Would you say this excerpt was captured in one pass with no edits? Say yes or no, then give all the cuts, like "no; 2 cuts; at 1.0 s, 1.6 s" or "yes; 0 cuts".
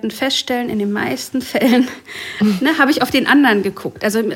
yes; 0 cuts